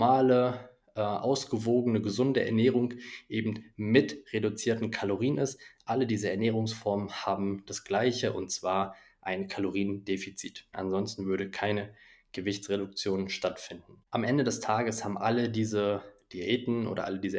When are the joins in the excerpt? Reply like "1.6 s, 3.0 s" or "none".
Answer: 10.7 s, 14.1 s

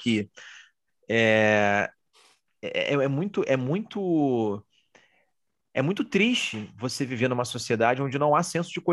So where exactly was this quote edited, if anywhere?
none

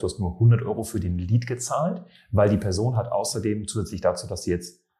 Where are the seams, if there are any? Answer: none

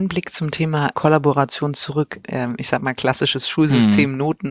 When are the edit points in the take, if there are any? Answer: 0.9 s, 2.2 s

